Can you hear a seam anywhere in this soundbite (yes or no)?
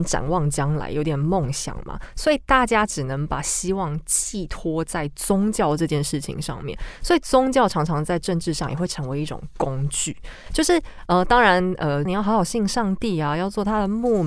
yes